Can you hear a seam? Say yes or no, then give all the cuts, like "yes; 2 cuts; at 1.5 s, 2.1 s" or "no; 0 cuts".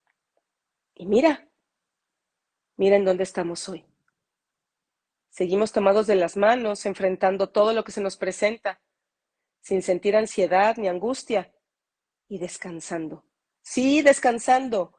no; 0 cuts